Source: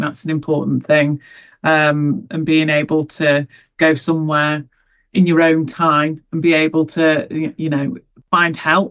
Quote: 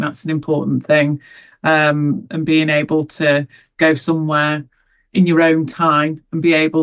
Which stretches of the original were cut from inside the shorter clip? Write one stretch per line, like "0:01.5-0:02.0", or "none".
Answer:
none